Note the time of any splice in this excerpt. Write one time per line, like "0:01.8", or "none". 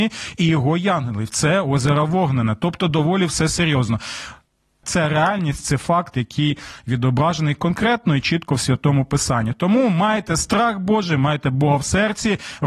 0:04.8